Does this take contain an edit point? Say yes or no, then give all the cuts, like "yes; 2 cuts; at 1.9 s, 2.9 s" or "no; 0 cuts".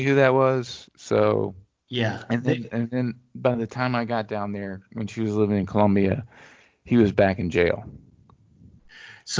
no; 0 cuts